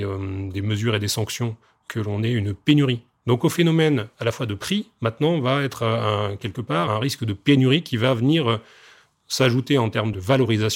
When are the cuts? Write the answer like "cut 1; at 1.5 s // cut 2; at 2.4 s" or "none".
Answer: cut 1; at 6.9 s